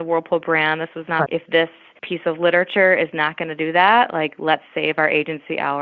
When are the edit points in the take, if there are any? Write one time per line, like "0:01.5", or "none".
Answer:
0:01.3